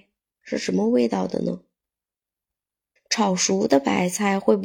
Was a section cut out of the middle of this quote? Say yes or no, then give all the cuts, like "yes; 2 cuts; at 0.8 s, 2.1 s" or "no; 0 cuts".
yes; 1 cut; at 3.0 s